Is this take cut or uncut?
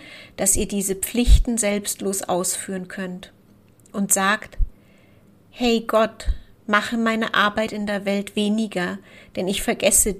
uncut